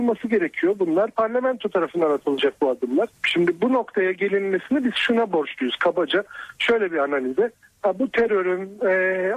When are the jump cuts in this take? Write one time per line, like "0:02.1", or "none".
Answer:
0:03.1